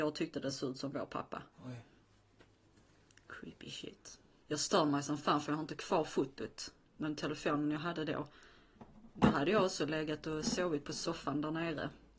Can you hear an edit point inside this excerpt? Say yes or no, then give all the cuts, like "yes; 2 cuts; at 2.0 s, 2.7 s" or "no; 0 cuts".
yes; 2 cuts; at 1.5 s, 4.4 s